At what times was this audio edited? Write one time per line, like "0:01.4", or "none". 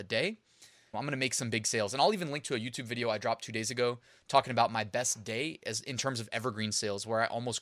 0:00.9